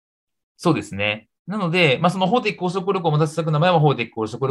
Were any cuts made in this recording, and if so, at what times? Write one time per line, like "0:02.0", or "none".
0:01.4